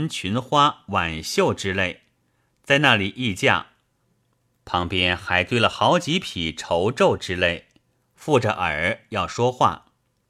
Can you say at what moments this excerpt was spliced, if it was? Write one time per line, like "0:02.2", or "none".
0:08.0